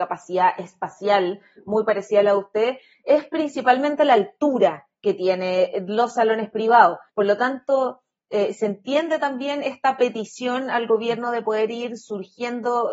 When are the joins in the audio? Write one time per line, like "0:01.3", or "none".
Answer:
none